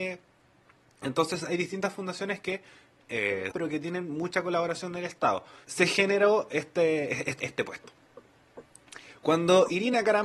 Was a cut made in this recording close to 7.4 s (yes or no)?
yes